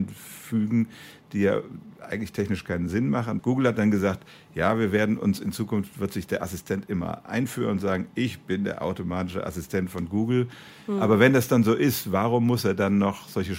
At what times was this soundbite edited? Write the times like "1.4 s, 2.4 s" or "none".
3.4 s